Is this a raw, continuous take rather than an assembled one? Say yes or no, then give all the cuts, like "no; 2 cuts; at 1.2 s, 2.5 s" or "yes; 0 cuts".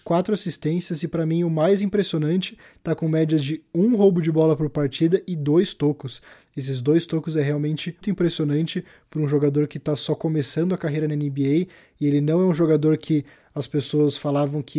no; 1 cut; at 8.0 s